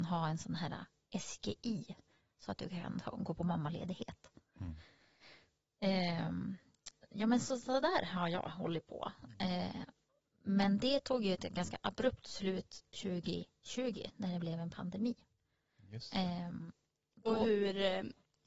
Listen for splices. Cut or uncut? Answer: uncut